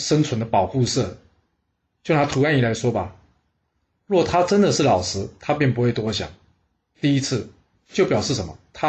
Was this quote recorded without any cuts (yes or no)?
no